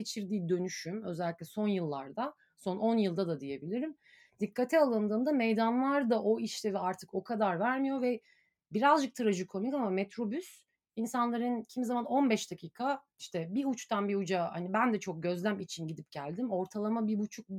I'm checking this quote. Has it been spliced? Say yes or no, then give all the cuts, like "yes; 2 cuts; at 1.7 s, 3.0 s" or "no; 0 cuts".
no; 0 cuts